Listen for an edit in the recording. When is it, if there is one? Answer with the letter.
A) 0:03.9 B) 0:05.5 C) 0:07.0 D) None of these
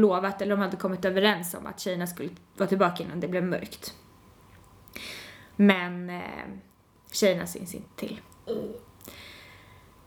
B